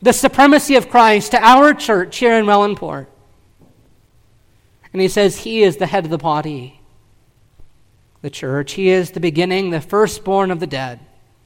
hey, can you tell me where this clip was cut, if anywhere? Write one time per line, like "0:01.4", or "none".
none